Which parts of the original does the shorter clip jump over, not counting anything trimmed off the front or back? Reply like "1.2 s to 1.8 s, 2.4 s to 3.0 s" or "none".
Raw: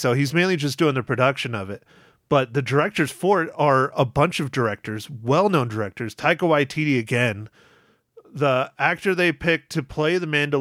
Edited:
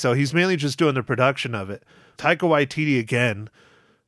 2.2 s to 6.2 s